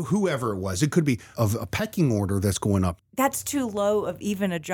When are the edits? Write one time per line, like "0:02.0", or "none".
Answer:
0:01.3
0:03.0